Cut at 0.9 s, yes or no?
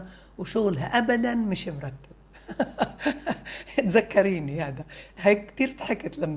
yes